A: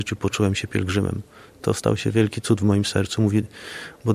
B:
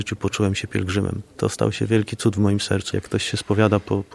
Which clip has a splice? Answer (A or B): B